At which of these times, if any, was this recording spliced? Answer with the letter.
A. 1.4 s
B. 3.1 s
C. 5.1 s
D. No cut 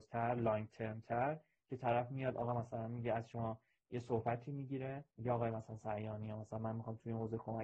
C